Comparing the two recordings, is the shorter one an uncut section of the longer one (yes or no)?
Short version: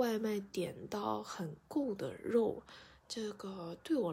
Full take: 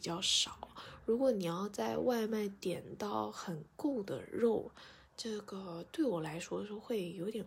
yes